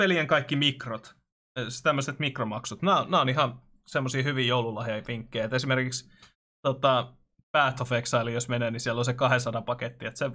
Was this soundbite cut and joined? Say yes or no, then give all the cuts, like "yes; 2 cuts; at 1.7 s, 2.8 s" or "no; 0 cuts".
no; 0 cuts